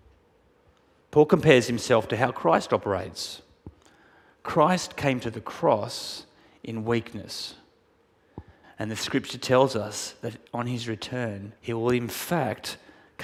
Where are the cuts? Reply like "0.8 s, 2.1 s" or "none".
8.6 s, 10.5 s, 11.6 s

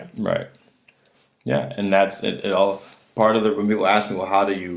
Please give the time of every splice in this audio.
none

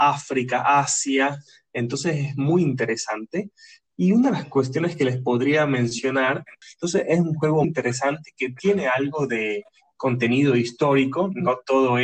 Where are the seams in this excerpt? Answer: 6.6 s, 7.6 s

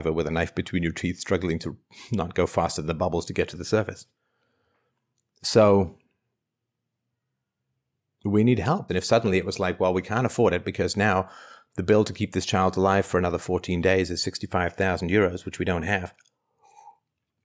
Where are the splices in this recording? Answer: 8.9 s

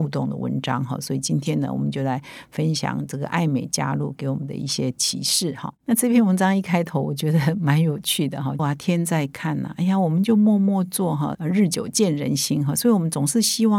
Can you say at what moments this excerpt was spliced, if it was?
8.6 s, 11.3 s

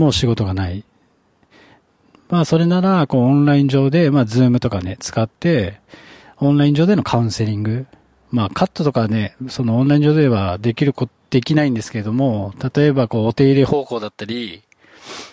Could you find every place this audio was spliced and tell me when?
none

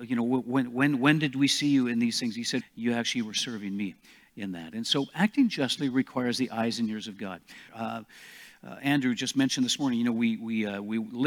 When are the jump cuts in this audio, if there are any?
2.6 s, 7.7 s

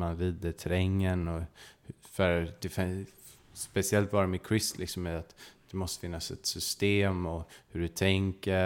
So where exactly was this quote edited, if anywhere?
none

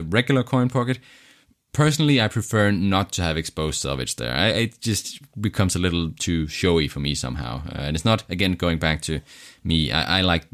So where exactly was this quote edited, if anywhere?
none

